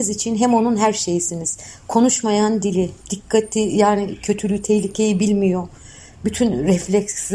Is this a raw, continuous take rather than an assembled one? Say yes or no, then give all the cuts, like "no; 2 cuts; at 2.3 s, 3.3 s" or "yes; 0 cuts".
no; 1 cut; at 3.0 s